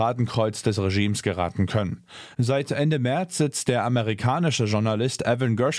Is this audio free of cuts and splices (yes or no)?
yes